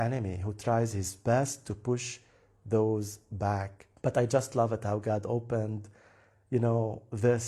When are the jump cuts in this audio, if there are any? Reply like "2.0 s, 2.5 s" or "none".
4.0 s